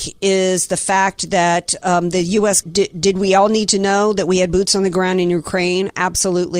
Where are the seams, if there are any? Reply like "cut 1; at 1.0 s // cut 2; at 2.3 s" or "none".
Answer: cut 1; at 2.6 s